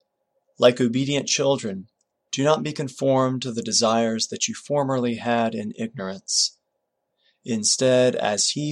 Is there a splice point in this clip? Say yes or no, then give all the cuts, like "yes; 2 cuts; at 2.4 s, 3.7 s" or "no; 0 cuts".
no; 0 cuts